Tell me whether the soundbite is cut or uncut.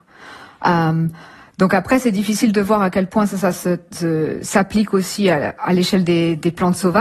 uncut